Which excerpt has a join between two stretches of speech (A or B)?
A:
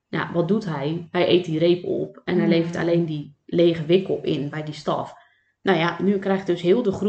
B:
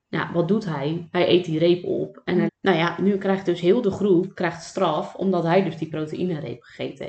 B